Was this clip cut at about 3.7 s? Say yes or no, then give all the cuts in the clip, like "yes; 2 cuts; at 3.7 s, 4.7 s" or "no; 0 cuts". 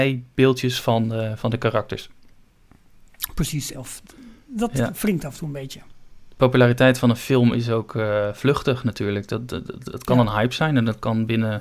yes; 1 cut; at 3.7 s